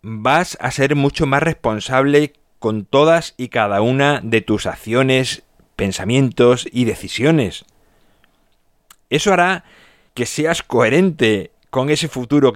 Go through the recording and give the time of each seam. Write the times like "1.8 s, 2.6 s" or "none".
none